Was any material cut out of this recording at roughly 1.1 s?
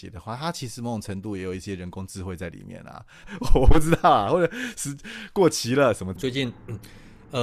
no; 2 cuts; at 3.2 s, 6.2 s

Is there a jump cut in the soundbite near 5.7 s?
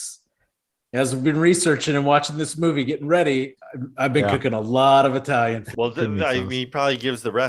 yes; 1 cut; at 5.7 s

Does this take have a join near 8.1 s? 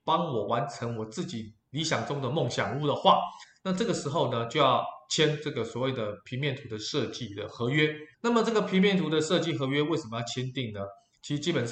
yes; 1 cut; at 8.1 s

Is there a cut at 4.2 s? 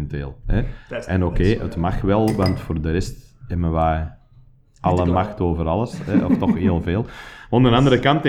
no; 0 cuts

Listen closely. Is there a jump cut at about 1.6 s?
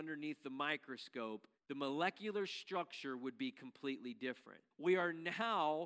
yes; 2 cuts; at 1.6 s, 4.7 s

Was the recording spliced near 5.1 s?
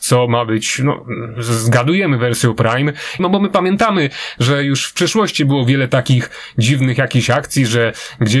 no; 1 cut; at 3.2 s

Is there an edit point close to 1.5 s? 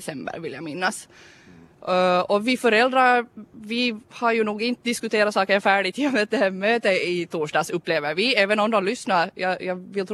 no; 0 cuts

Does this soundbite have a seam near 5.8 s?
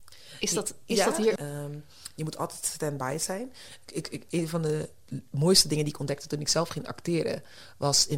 no; 2 cuts; at 1.4 s, 4.3 s

